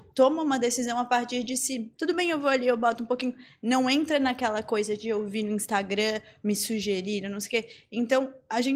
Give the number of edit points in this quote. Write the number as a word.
one